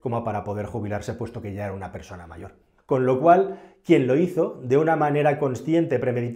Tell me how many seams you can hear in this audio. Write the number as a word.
one